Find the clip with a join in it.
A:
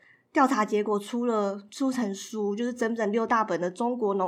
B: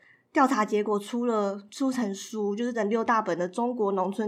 B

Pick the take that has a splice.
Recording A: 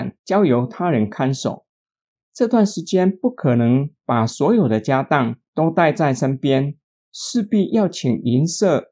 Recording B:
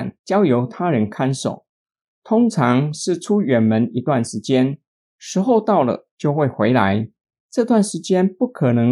A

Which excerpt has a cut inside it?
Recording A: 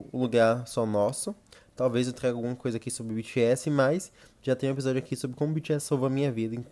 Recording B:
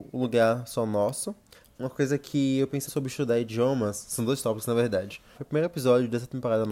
B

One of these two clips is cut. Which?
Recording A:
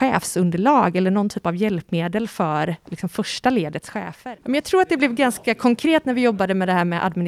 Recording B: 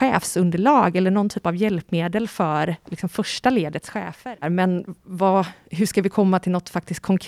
B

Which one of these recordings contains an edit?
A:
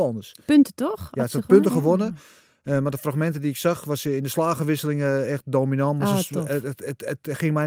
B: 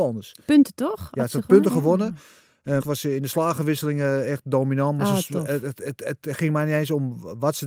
B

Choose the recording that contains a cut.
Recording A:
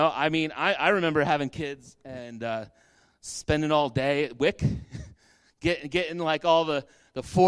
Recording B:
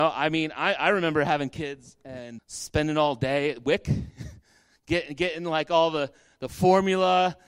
B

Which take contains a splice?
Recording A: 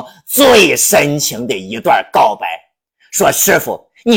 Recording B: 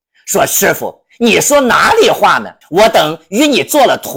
B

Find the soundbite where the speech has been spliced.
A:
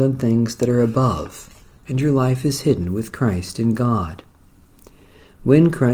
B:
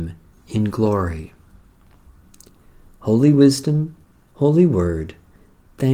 A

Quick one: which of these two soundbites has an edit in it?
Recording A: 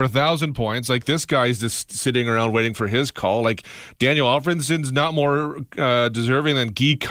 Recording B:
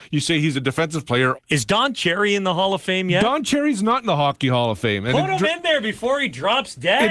B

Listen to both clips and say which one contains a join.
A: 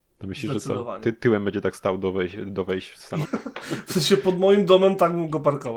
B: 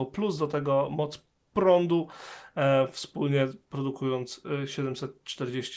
A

